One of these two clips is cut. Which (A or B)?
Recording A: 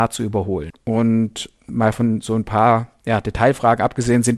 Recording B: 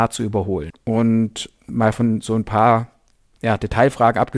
A